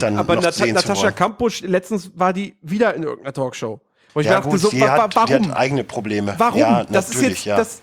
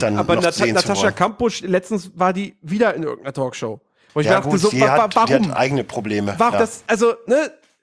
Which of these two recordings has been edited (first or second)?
second